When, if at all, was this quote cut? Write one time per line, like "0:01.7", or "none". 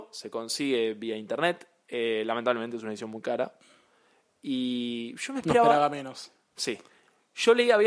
none